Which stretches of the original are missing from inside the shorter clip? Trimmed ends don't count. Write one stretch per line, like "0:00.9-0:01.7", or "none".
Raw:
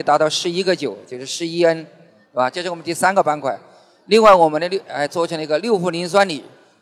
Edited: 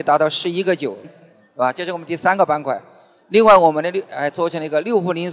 0:01.0-0:01.8